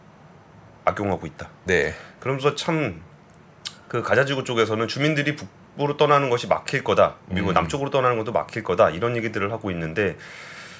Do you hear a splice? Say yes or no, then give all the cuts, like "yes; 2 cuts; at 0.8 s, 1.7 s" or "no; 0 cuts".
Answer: yes; 1 cut; at 1.7 s